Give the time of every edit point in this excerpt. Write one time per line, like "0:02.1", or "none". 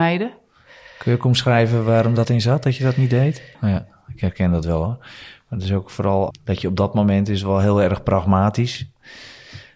0:03.5
0:06.3

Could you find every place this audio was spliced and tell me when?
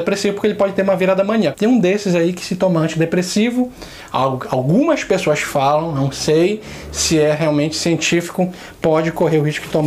0:01.5

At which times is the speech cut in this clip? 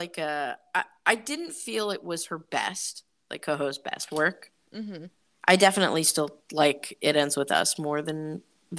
none

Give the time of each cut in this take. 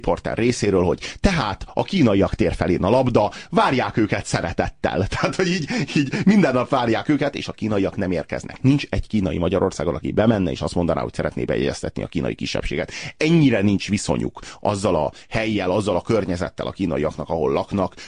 none

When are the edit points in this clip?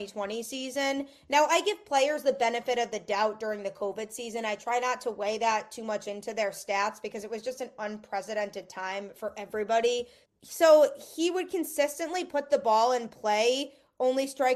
0:10.3

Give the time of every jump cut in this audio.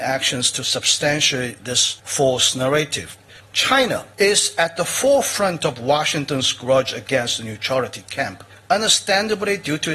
0:03.4

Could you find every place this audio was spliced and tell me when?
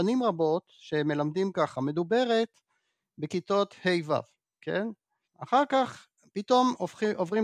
0:05.2

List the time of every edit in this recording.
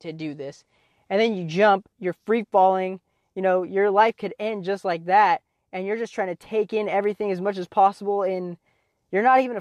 none

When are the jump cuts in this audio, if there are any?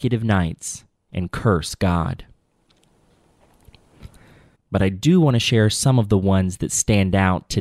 0:04.5

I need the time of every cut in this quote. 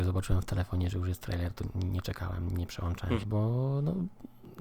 0:03.2

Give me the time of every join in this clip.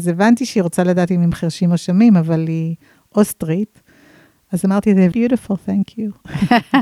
0:05.1

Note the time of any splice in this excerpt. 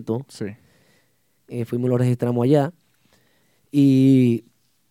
none

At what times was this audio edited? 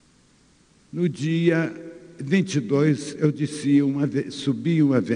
none

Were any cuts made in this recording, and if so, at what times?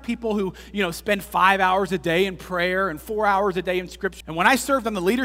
0:04.2

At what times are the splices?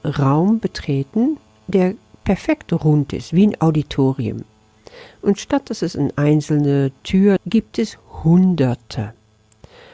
0:07.4

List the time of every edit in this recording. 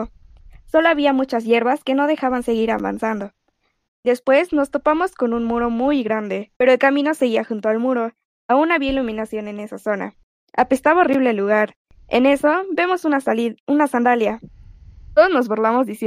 0:03.9
0:06.5

